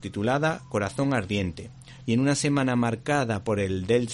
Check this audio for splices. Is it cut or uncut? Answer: cut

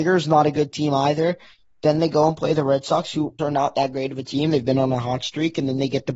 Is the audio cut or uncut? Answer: cut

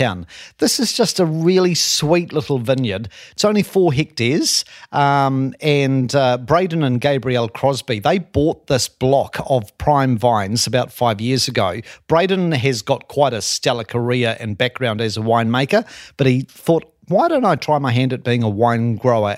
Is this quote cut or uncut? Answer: uncut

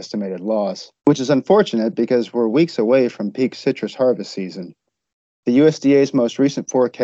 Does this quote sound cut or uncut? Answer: cut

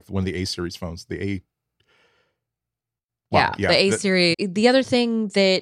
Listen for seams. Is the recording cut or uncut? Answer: cut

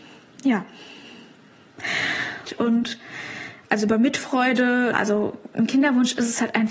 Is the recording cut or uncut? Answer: cut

